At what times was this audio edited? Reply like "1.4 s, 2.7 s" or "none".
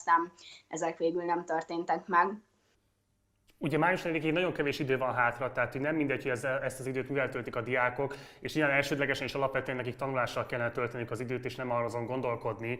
none